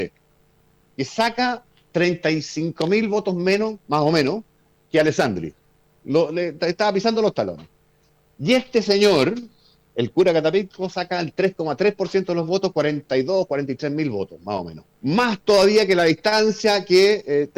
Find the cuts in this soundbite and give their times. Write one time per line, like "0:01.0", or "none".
0:14.9